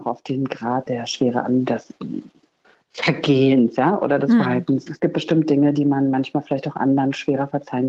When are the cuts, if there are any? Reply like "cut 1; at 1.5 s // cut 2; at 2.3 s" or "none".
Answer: none